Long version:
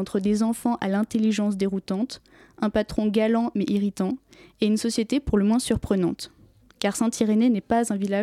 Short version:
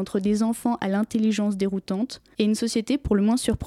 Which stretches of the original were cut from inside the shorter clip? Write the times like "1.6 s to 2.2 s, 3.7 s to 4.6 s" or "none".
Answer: 2.3 s to 4.6 s

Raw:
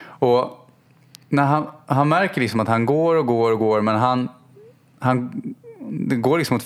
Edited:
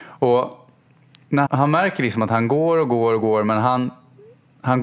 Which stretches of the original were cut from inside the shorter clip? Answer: 1.5 s to 1.8 s

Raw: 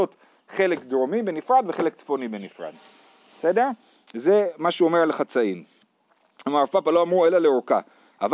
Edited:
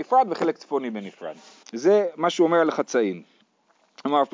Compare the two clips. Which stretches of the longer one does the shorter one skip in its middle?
3.0 s to 4.0 s

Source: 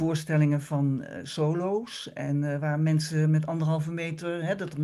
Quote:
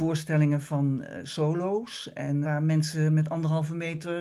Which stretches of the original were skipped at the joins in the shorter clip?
2.4 s to 2.6 s

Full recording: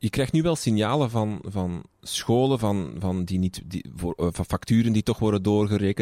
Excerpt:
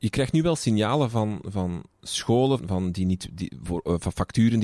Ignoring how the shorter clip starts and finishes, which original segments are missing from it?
2.6 s to 2.9 s

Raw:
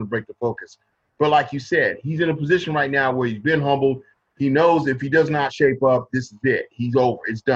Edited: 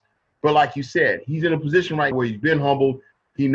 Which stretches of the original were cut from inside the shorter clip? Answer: 2.9 s to 3.1 s

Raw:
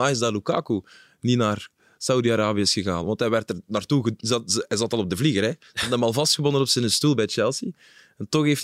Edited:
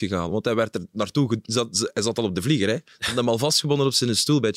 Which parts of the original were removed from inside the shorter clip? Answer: none

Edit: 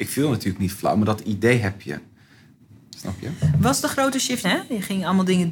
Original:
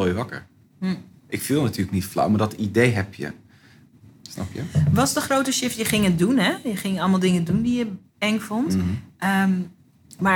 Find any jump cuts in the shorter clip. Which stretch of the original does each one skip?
5.8 s to 6.4 s

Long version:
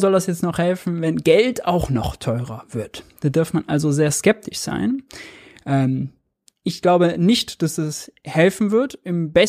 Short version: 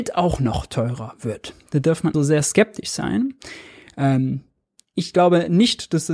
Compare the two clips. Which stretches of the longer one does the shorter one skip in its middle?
3.6 s to 3.8 s

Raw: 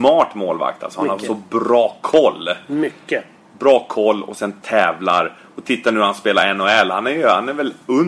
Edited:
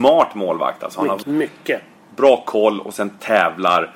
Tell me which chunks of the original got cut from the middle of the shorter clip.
1.2 s to 2.6 s

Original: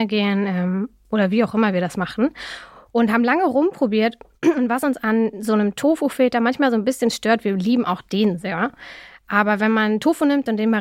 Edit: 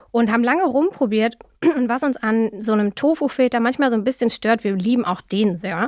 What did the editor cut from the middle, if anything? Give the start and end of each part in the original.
none

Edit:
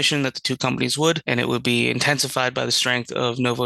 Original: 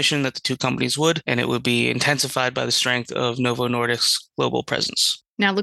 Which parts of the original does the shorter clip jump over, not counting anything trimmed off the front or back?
none

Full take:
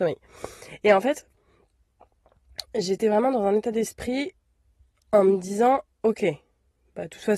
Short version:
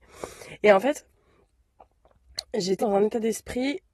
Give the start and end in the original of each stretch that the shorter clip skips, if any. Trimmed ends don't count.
3.0 s to 3.3 s

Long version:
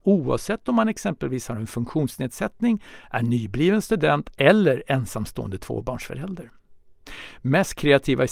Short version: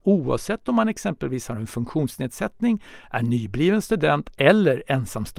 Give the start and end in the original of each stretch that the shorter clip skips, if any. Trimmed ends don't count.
none

